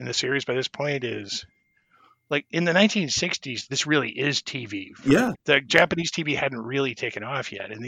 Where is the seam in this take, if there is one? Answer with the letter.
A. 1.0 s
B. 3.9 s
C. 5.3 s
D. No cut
C